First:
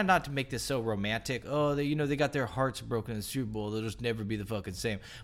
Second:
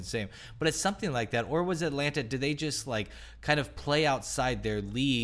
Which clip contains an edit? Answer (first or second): first